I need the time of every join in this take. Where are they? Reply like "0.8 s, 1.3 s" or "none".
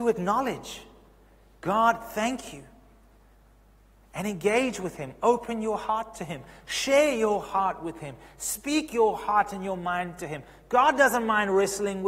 none